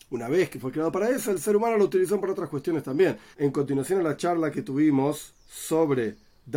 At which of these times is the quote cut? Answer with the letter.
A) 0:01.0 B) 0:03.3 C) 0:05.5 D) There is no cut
B